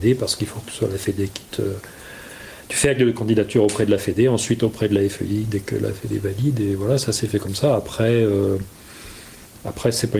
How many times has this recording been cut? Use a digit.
0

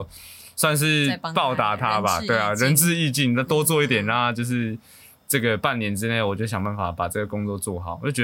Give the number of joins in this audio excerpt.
0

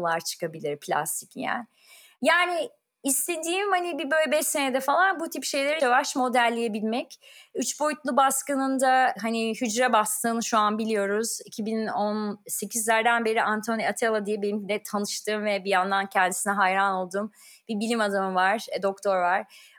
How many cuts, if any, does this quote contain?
1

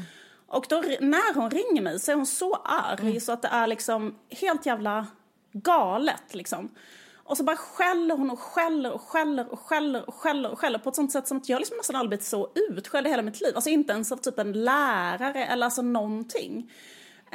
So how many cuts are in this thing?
0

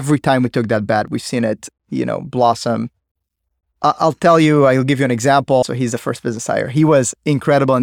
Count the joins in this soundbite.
1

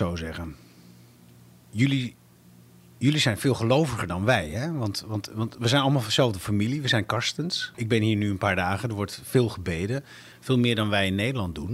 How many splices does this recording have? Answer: 1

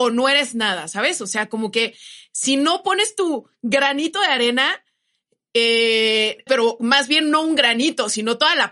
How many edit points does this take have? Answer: 1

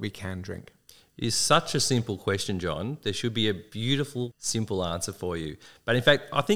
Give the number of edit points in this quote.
1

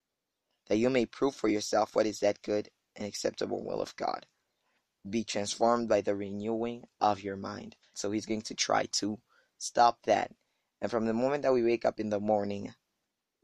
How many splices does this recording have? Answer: 1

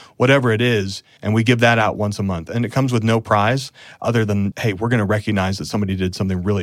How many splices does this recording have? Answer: 2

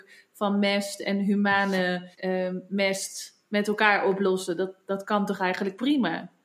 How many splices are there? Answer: 1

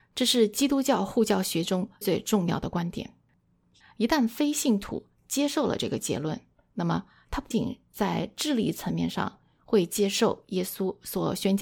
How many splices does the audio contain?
3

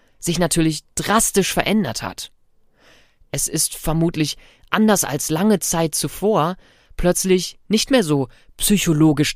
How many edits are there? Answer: 0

